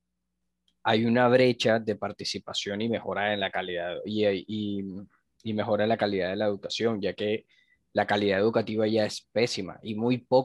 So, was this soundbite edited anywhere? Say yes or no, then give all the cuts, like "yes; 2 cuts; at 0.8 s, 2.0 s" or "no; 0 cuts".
no; 0 cuts